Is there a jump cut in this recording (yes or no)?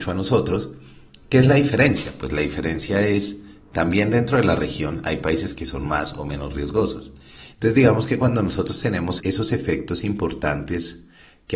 yes